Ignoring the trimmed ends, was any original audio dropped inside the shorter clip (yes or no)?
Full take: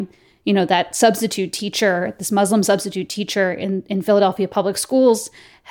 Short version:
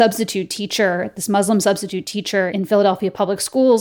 yes